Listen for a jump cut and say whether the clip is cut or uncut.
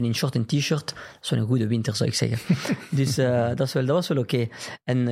uncut